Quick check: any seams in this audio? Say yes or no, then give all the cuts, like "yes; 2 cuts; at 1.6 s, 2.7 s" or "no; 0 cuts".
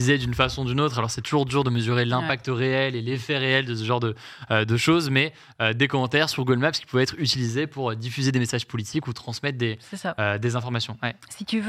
no; 0 cuts